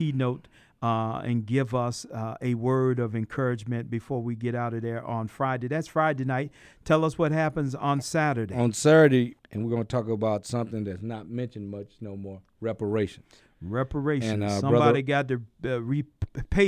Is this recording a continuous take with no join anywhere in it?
no; 1 cut; at 9.4 s

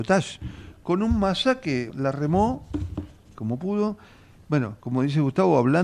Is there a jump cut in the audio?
yes; 2 cuts; at 1.9 s, 3.3 s

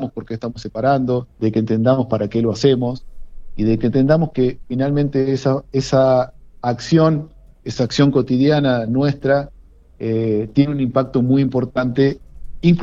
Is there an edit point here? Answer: yes; 1 cut; at 1.3 s

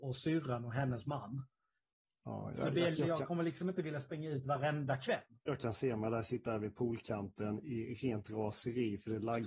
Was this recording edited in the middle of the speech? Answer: yes; 2 cuts; at 2.9 s, 5.3 s

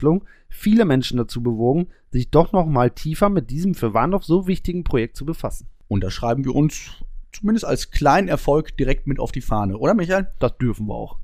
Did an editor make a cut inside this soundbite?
no; 0 cuts

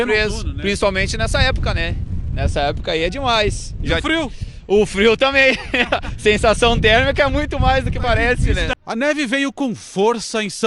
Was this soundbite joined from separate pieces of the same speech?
no; 0 cuts

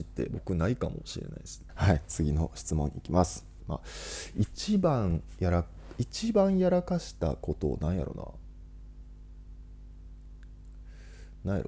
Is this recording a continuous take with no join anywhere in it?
no; 2 cuts; at 1.7 s, 3.6 s

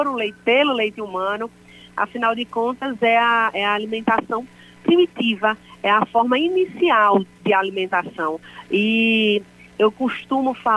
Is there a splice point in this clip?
no; 0 cuts

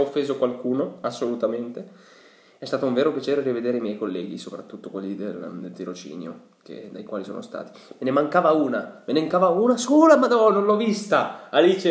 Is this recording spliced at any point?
no; 0 cuts

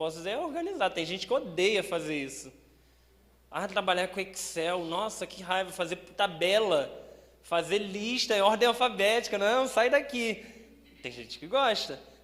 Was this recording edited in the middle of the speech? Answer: no; 0 cuts

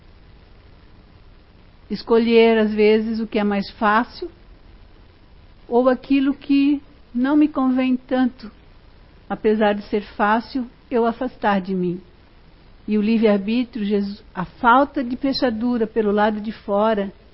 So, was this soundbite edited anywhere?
yes; 1 cut; at 12.7 s

